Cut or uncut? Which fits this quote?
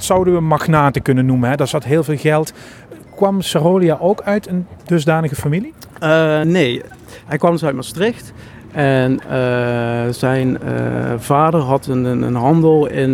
uncut